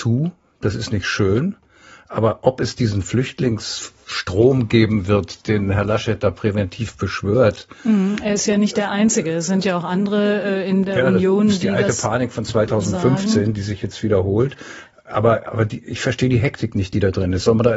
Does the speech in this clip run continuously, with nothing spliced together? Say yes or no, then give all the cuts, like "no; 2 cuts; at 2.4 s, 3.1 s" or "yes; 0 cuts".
yes; 0 cuts